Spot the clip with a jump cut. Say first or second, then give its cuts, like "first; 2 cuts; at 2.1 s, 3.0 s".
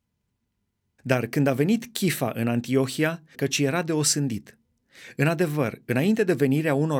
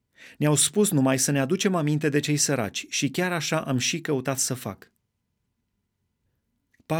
first; 2 cuts; at 1.0 s, 3.3 s